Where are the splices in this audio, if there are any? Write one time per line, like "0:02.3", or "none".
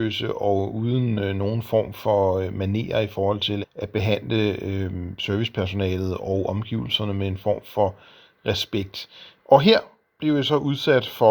0:03.6
0:09.4

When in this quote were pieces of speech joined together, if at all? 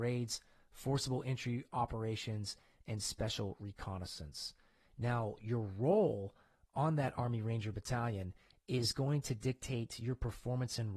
none

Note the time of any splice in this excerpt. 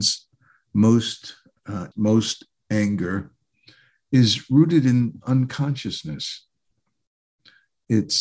0:01.9

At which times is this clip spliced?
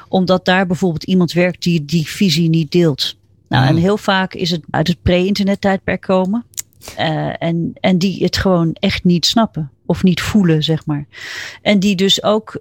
0:04.7

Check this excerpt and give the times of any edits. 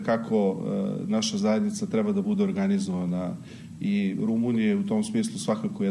none

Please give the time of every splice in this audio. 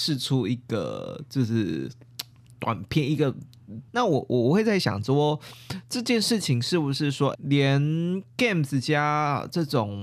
0:03.9
0:07.3

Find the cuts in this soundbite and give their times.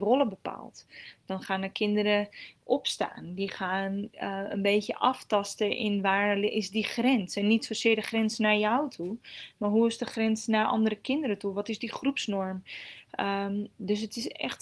none

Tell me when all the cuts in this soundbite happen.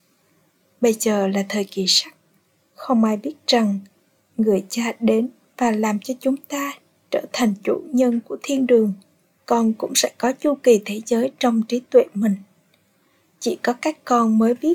0:09.4

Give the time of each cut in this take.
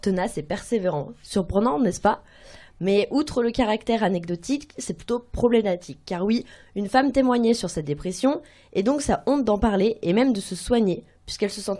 none

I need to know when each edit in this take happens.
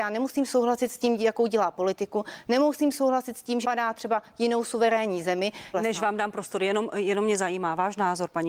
0:03.6
0:05.7

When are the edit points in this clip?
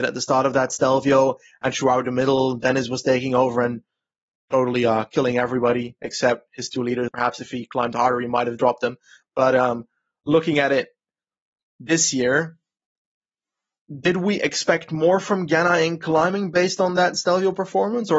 0:07.1

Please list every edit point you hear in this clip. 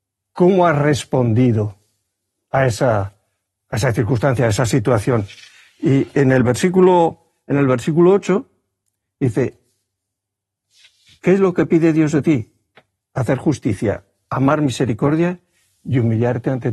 none

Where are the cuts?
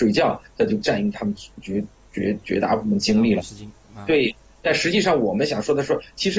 none

